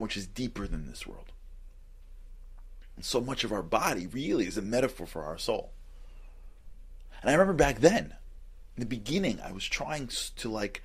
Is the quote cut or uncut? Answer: uncut